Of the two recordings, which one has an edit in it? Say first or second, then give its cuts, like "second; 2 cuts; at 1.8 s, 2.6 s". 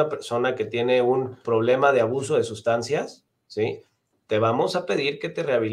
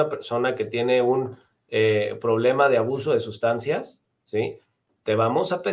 first; 1 cut; at 1.4 s